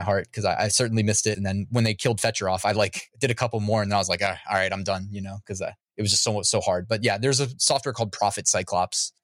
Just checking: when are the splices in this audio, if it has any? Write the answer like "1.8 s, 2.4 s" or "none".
1.3 s

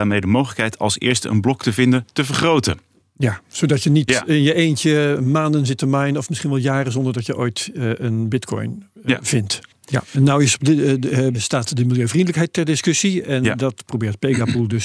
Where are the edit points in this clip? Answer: 9.7 s, 11.3 s

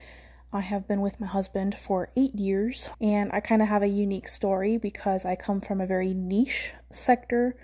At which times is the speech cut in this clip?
2.9 s

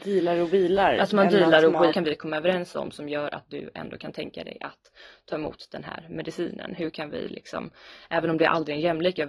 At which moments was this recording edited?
1.9 s

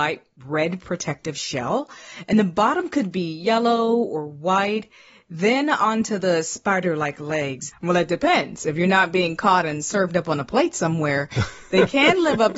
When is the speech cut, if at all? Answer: 7.7 s

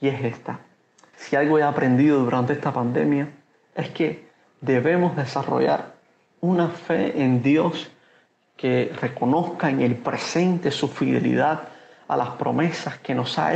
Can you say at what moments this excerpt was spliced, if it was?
1.1 s

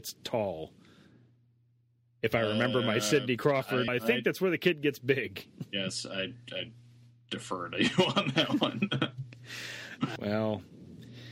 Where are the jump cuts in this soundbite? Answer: 3.9 s, 10.2 s

